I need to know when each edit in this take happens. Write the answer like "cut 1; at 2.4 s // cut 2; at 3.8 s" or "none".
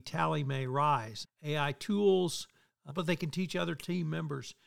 cut 1; at 1.2 s // cut 2; at 2.9 s